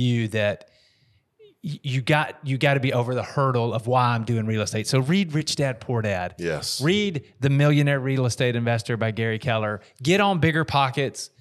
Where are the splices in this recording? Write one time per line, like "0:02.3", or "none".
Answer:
none